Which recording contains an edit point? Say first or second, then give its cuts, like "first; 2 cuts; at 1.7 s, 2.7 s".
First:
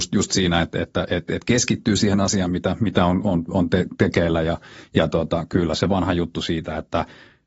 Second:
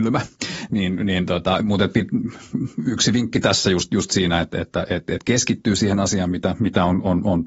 first; 1 cut; at 3.2 s